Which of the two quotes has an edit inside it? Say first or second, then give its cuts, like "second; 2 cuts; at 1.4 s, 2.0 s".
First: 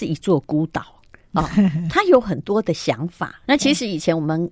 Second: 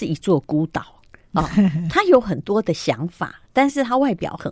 first; 1 cut; at 3.5 s